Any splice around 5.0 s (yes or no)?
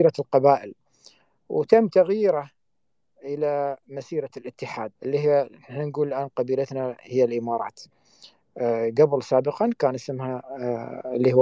yes